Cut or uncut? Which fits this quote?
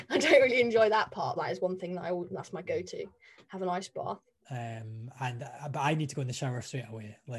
cut